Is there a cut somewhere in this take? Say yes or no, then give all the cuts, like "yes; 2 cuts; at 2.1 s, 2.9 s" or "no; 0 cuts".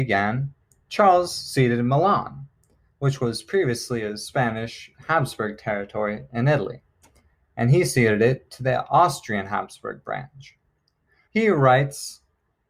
yes; 1 cut; at 11.3 s